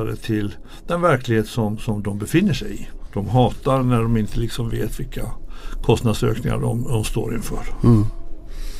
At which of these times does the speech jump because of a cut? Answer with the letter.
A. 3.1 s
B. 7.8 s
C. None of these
A